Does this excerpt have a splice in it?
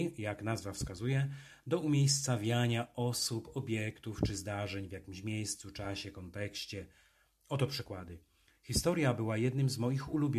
no; 0 cuts

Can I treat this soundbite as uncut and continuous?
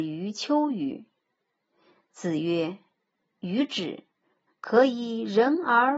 no; 1 cut; at 4.5 s

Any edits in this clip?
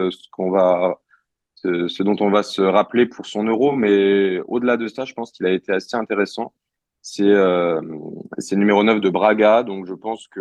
no; 0 cuts

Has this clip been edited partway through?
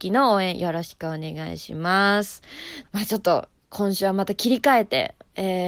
yes; 1 cut; at 2.8 s

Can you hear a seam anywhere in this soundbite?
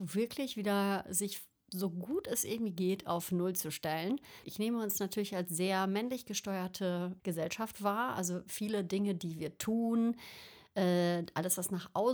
yes; 2 cuts; at 4.4 s, 7.2 s

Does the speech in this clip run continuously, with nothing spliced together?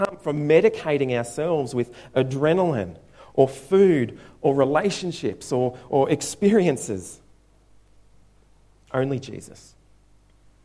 yes; 0 cuts

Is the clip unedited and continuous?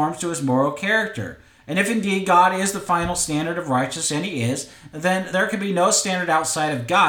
no; 1 cut; at 5.3 s

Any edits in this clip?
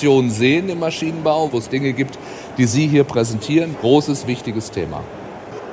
yes; 2 cuts; at 1.5 s, 3.7 s

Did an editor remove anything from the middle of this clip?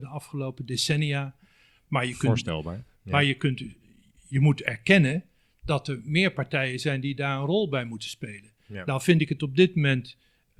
no; 0 cuts

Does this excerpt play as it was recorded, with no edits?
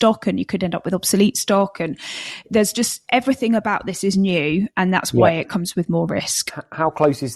yes; 0 cuts

